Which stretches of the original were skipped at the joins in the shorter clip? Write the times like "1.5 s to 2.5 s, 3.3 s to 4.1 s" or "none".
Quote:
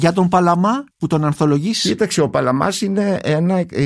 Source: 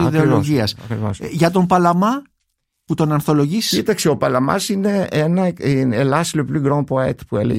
2.3 s to 2.8 s